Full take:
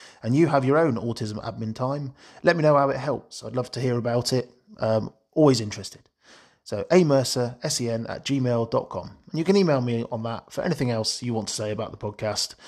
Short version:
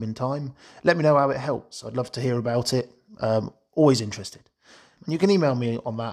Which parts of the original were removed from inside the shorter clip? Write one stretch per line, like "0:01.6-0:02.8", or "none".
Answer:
0:06.6-0:09.2